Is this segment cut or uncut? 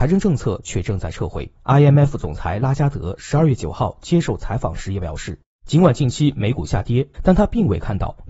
cut